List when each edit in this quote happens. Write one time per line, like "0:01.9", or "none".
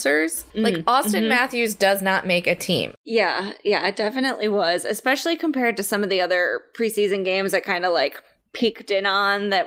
0:02.9